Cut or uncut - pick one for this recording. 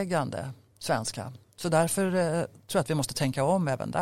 uncut